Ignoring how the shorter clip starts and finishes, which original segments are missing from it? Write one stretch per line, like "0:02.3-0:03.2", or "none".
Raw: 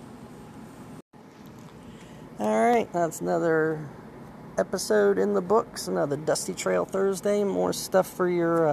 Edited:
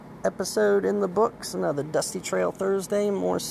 none

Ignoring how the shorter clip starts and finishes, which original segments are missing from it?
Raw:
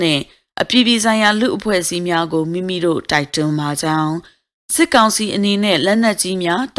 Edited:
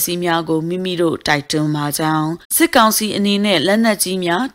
0:04.3-0:04.6

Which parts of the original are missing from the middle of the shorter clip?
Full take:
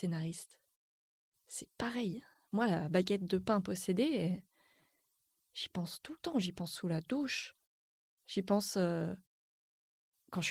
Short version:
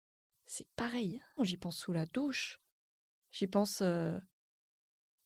0:02.4-0:06.3

